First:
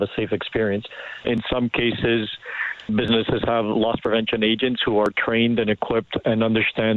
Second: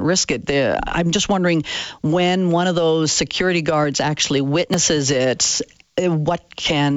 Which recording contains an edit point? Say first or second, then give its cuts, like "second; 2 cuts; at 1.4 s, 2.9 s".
first; 2 cuts; at 1.2 s, 2.9 s